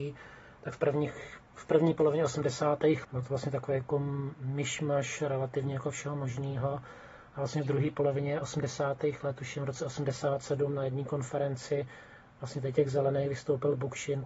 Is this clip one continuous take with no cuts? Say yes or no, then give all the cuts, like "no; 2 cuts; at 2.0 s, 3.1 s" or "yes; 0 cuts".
no; 1 cut; at 3.0 s